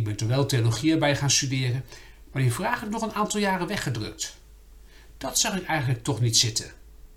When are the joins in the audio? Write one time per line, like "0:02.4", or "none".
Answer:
none